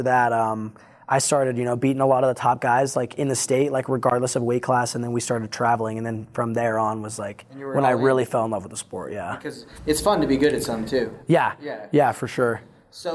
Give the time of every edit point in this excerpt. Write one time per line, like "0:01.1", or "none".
none